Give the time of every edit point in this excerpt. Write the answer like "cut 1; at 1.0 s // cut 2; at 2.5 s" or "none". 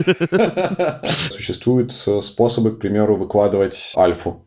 cut 1; at 1.3 s

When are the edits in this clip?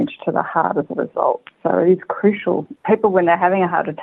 none

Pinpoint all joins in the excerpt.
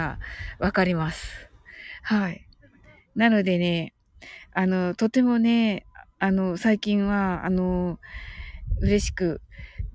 none

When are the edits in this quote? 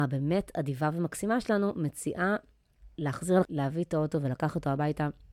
cut 1; at 3.5 s

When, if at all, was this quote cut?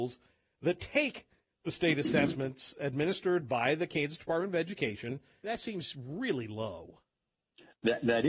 cut 1; at 5.4 s

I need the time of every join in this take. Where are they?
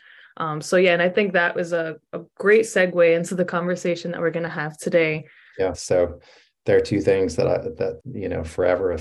cut 1; at 5.7 s // cut 2; at 8.0 s

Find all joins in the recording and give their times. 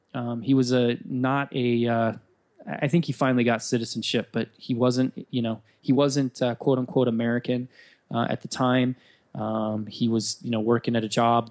none

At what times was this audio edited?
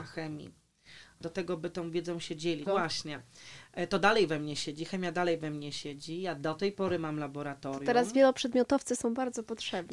cut 1; at 2.7 s

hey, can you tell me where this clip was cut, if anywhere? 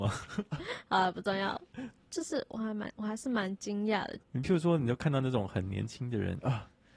cut 1; at 2.1 s // cut 2; at 4.2 s

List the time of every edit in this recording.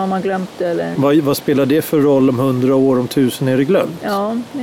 cut 1; at 1.0 s

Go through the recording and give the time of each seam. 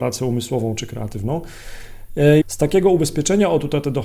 cut 1; at 2.4 s

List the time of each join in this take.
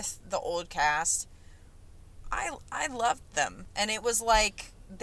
cut 1; at 3.7 s

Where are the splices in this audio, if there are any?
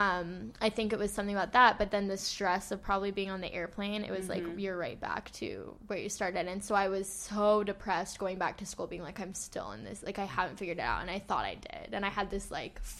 none

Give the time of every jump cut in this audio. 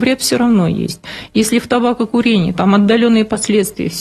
cut 1; at 1.3 s // cut 2; at 2.5 s

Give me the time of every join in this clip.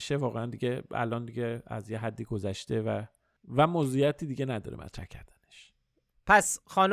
none

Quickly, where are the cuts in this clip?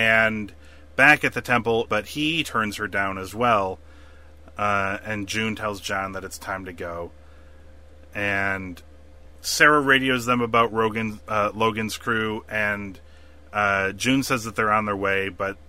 cut 1; at 1.9 s

